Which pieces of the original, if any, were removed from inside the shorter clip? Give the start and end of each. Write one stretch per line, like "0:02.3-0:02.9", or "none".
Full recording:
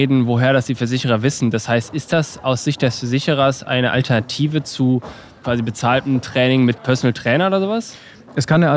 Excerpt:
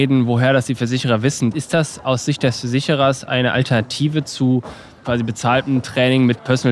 0:01.5-0:01.9

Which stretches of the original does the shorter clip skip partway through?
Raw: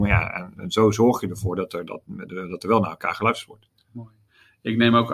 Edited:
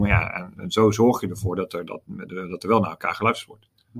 none

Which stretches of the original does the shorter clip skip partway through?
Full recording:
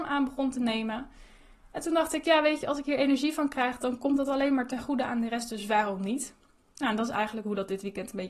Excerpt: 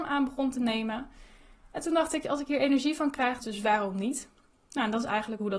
0:02.2-0:02.6
0:03.8-0:05.5

